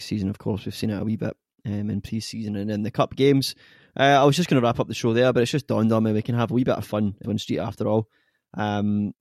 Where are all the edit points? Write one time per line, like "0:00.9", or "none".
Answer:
0:07.2

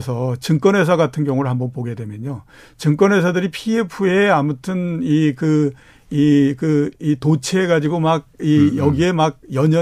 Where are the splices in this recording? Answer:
none

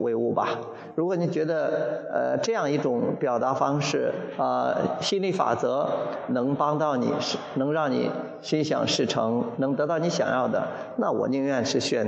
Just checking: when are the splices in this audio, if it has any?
none

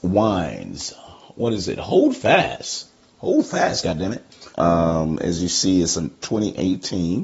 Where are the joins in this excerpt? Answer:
0:04.5

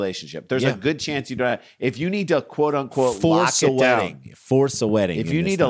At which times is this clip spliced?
none

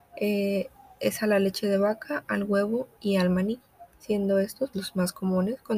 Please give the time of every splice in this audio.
0:04.7

